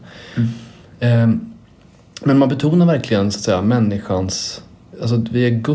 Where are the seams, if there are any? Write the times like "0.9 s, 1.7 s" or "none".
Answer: none